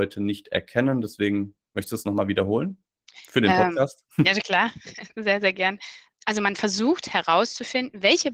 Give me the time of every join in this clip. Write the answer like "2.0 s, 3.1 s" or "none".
none